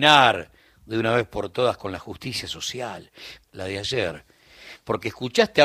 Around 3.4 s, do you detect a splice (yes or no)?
yes